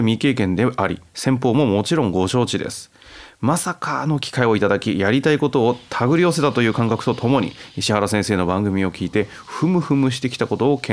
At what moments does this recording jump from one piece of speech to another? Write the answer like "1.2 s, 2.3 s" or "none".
none

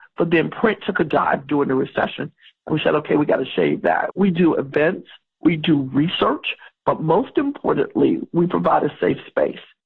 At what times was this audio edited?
4.1 s

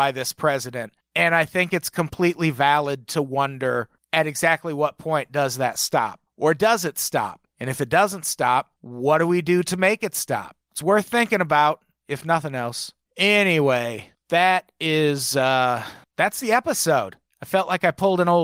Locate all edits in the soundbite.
none

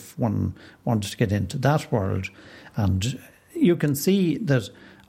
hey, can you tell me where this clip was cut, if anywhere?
none

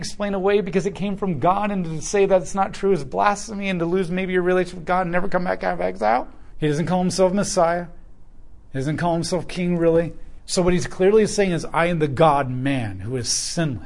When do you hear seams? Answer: 6.5 s, 10.4 s

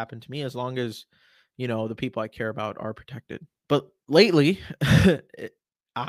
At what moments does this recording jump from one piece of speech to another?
3.6 s

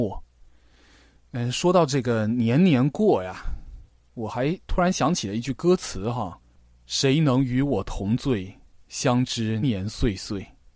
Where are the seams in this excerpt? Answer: 6.4 s, 9.6 s

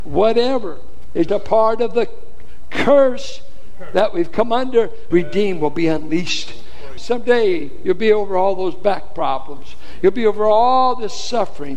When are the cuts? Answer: 1.3 s, 5.1 s, 7.0 s

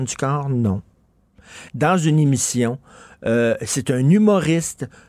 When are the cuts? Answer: 1.7 s

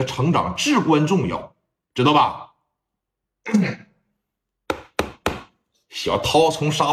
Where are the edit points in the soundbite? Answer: none

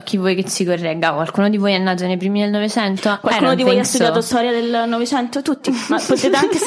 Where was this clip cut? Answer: none

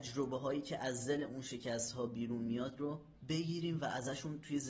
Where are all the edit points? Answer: 3.2 s

